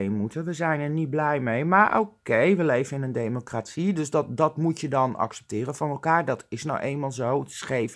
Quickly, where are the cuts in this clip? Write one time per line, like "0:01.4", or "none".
none